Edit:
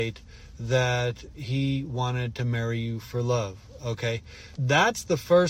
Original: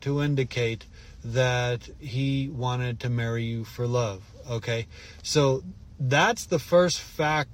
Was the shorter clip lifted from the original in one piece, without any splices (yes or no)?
no